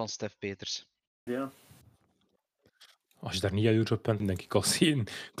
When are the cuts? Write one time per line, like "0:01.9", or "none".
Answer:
0:01.3
0:04.2

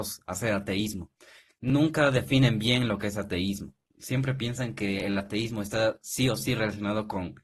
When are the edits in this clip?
none

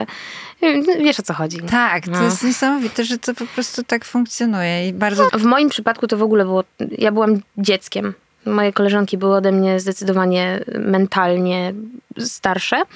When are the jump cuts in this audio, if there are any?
0:05.3

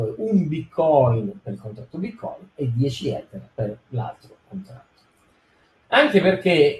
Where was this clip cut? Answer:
0:05.8

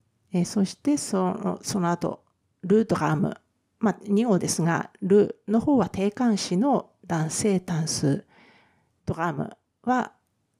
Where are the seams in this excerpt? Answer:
none

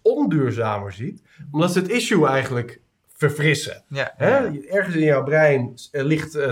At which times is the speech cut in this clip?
none

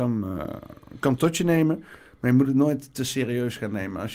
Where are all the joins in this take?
none

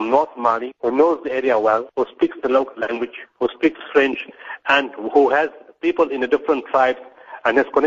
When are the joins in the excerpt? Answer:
none

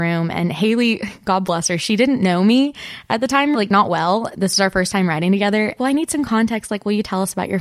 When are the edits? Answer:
0:03.5
0:05.8

